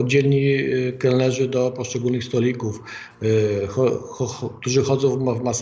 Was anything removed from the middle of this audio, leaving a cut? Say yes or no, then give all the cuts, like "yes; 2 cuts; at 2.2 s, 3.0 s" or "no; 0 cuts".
no; 0 cuts